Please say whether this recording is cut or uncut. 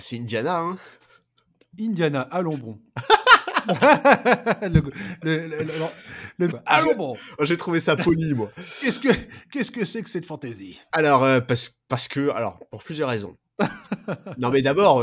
cut